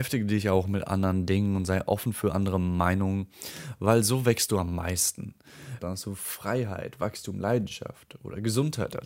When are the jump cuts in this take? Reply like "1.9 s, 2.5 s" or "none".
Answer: 5.8 s